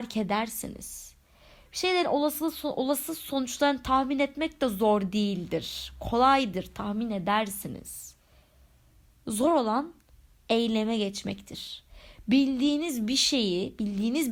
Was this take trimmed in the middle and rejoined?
no; 0 cuts

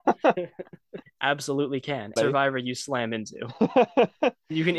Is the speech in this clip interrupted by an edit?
yes; 2 cuts; at 1.0 s, 2.2 s

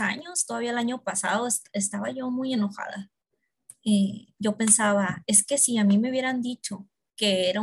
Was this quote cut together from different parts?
yes; 1 cut; at 4.4 s

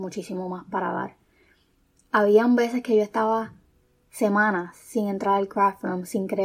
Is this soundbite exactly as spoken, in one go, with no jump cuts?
yes; 0 cuts

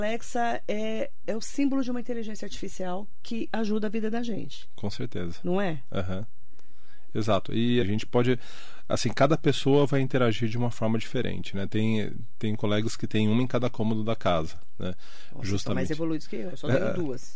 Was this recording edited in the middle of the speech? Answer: yes; 1 cut; at 7.8 s

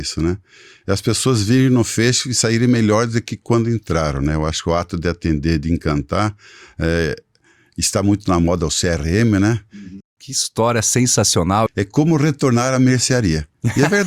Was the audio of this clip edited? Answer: yes; 2 cuts; at 10.0 s, 11.7 s

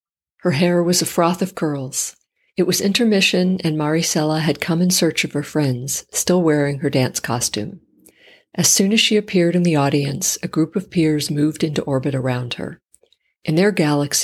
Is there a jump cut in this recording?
no; 0 cuts

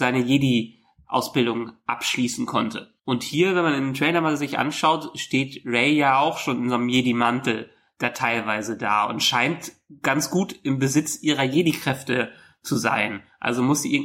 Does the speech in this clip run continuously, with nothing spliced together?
no; 1 cut; at 3.0 s

